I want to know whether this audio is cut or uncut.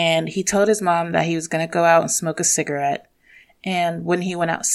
uncut